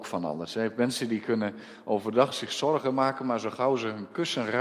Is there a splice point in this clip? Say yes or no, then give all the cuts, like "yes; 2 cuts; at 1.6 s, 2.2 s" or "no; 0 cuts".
no; 0 cuts